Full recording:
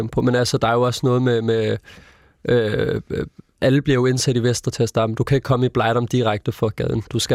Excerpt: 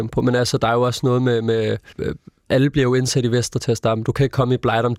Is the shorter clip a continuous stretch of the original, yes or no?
no